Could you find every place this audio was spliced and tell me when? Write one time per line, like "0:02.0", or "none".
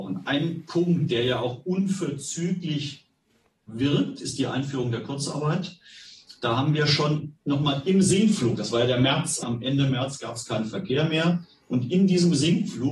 0:09.4